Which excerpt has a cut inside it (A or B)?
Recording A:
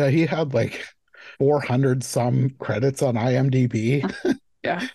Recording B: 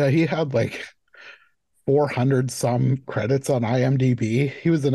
A